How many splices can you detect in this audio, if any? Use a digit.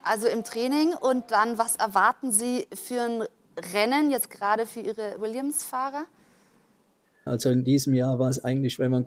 1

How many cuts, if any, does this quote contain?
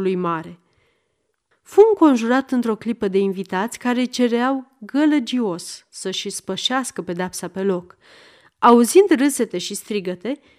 1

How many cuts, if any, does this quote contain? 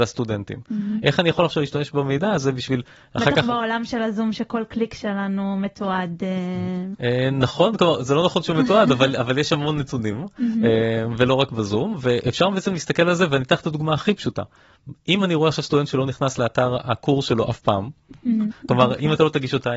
2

